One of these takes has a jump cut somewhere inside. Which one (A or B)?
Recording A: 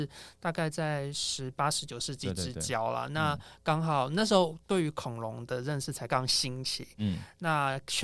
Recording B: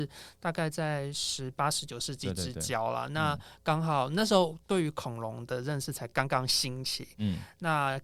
A